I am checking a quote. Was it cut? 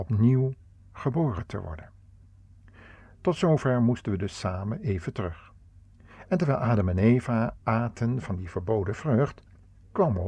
no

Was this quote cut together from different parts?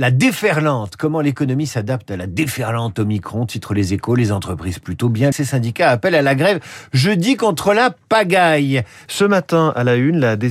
yes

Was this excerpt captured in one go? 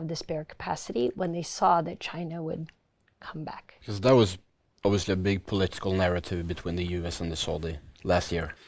yes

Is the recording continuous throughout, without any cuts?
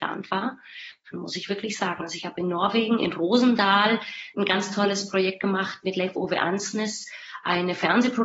no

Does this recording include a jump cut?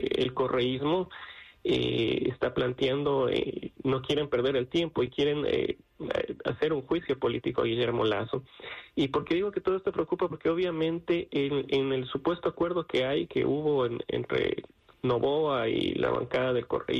yes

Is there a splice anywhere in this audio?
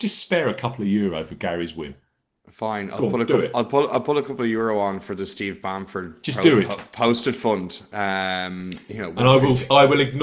no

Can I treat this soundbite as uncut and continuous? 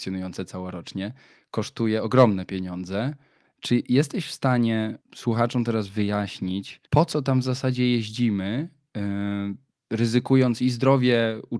no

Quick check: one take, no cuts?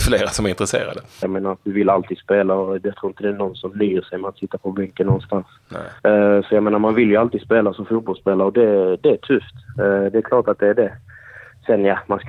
no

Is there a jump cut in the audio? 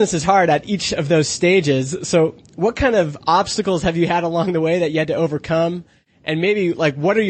no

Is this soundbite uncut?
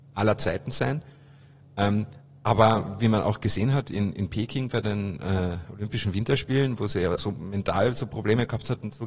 no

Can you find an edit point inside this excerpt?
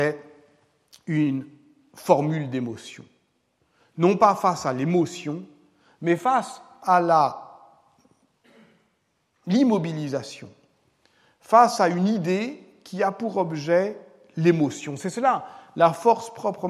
no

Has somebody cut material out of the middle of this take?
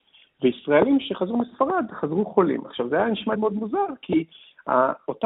yes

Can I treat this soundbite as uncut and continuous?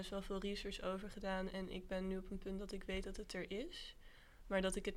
yes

